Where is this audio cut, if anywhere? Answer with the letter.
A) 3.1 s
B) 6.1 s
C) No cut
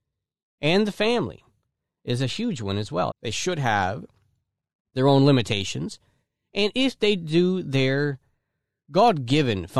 A